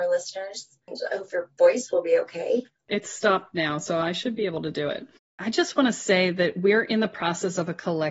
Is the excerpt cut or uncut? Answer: cut